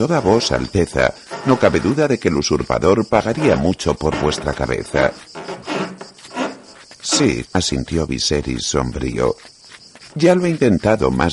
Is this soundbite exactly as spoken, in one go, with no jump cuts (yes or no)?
no